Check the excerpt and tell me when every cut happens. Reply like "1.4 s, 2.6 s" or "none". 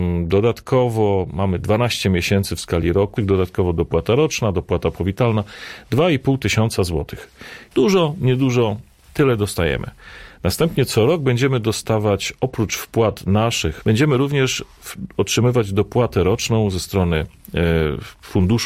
3.2 s, 7.7 s, 13.8 s